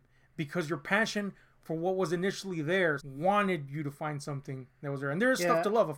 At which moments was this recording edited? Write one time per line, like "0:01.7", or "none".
0:03.0